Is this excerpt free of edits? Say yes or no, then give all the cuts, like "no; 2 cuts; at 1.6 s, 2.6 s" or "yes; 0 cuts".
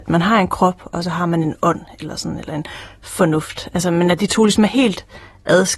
yes; 0 cuts